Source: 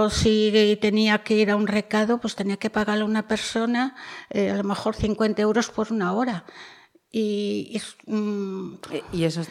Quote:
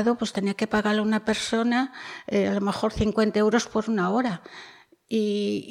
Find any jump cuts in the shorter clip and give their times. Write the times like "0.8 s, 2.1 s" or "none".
none